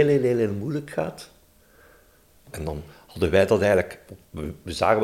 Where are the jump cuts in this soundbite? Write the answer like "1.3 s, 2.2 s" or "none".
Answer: 2.5 s